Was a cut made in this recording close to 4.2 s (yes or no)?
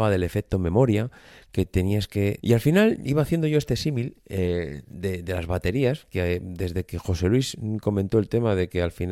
no